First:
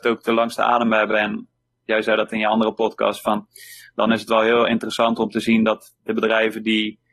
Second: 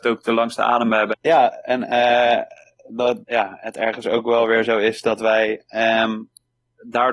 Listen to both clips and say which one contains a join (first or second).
second